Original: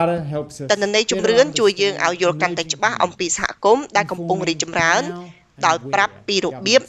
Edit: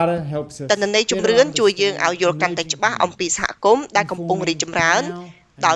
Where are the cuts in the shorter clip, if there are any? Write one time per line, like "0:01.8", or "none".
none